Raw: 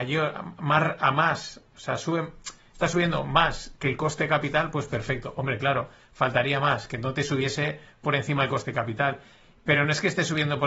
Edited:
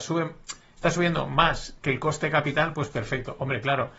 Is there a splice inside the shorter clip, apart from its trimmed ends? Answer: no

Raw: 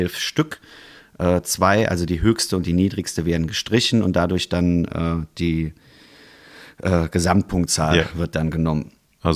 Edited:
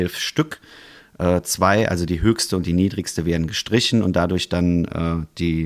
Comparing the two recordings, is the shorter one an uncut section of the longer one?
yes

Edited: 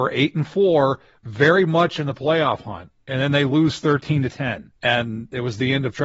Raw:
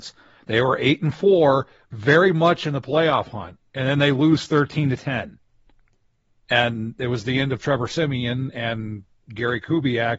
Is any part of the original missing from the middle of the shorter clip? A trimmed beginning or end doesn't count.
yes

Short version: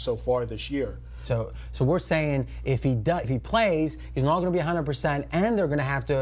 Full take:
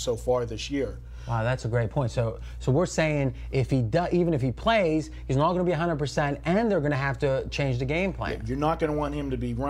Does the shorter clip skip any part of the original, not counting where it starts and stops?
yes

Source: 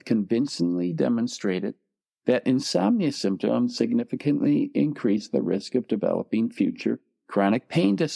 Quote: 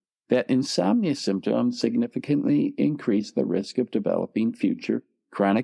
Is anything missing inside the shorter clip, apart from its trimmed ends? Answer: no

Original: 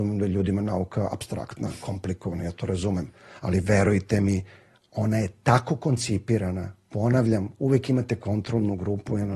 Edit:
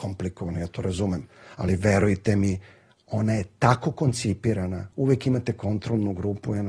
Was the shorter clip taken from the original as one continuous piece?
no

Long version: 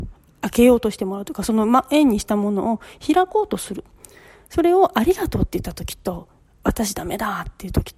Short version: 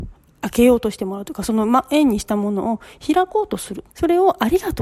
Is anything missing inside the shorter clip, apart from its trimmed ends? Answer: yes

